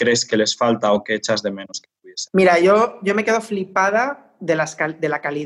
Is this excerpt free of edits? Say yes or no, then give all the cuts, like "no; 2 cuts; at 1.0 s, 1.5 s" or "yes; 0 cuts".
yes; 0 cuts